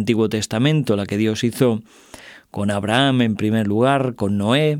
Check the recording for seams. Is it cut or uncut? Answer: uncut